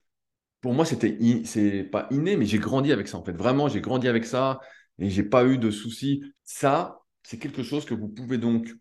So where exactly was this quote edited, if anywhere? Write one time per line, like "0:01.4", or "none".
0:06.3